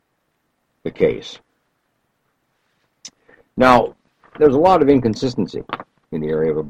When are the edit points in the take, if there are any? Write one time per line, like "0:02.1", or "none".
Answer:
none